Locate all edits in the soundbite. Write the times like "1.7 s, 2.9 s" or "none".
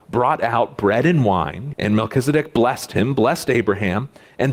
1.7 s